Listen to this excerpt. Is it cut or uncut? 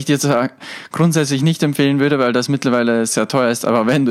uncut